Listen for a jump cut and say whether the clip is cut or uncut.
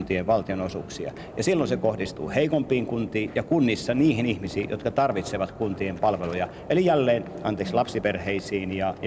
uncut